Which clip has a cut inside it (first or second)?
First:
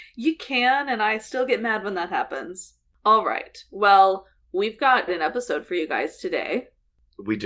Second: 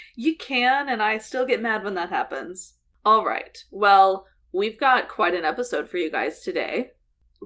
first